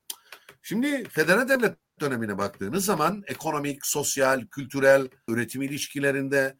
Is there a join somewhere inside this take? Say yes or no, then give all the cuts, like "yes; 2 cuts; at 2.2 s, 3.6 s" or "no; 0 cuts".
yes; 1 cut; at 5.3 s